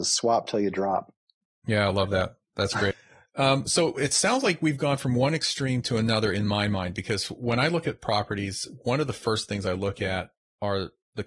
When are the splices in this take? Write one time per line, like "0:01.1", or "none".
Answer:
0:02.9